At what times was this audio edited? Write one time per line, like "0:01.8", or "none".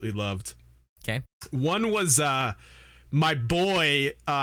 none